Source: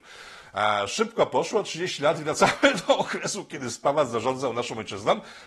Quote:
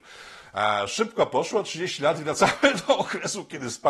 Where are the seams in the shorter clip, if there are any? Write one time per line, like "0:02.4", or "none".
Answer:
none